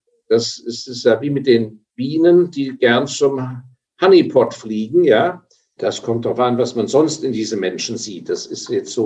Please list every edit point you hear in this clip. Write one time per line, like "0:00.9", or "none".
0:05.8